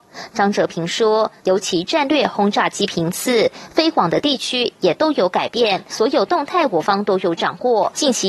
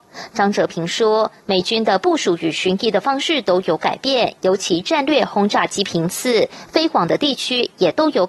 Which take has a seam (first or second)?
first